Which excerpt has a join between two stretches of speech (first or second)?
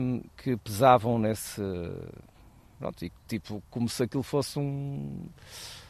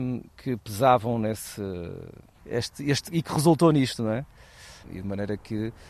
second